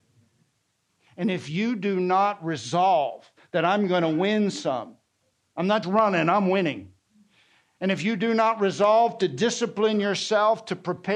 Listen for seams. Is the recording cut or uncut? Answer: cut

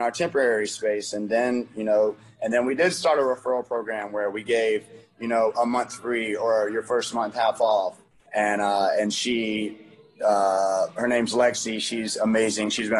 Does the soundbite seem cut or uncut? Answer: cut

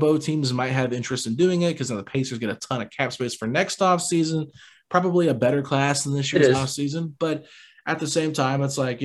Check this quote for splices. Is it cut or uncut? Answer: uncut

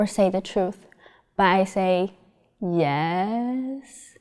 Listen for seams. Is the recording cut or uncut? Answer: uncut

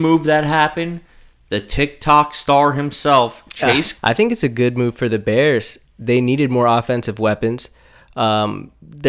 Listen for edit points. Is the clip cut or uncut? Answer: cut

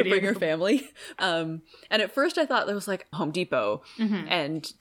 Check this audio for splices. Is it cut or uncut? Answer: cut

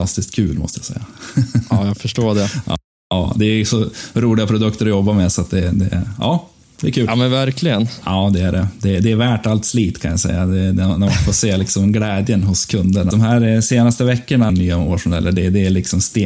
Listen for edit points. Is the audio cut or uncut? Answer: cut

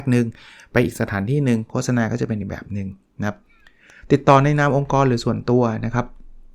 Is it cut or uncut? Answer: uncut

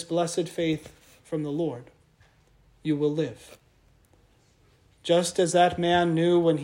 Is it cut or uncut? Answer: uncut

